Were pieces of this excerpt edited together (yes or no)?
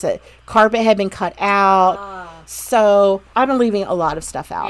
no